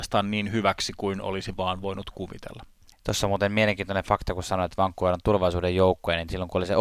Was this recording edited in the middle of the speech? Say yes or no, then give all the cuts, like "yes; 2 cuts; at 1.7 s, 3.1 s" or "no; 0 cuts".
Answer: yes; 1 cut; at 2.9 s